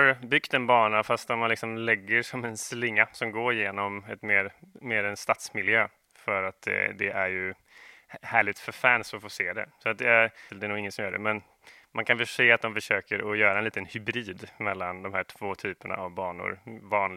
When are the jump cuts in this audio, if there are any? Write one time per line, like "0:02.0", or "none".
0:10.5